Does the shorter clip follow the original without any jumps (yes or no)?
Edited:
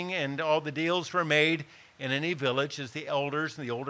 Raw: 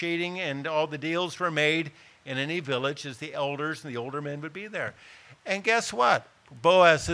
yes